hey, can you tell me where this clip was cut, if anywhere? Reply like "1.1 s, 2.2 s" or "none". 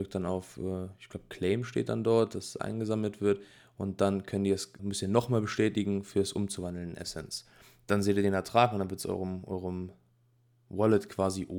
4.8 s